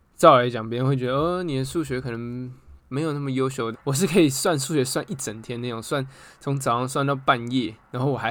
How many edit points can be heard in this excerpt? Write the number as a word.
one